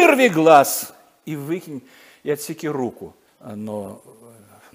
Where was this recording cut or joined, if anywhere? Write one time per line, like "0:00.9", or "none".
0:03.3